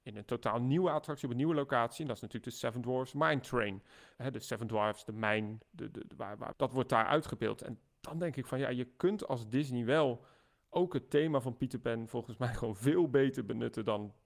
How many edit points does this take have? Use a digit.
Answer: 2